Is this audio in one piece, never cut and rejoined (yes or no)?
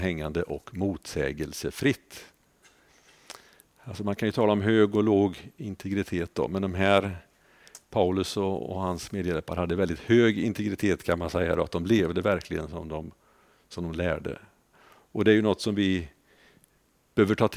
yes